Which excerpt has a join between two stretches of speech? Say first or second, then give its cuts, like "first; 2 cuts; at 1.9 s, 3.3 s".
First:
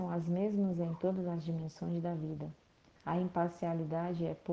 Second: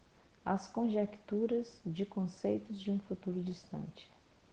first; 1 cut; at 3.0 s